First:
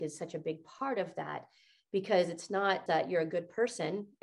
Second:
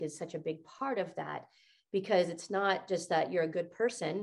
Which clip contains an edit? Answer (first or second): first